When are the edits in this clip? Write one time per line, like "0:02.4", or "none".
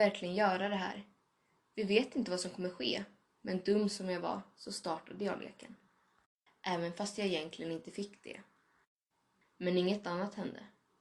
0:03.2
0:06.5
0:09.4